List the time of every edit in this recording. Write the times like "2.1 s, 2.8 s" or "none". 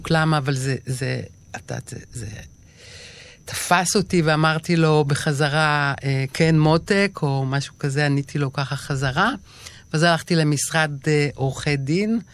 none